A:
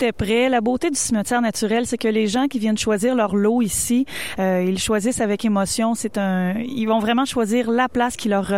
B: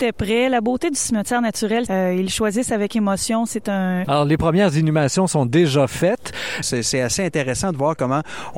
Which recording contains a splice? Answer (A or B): B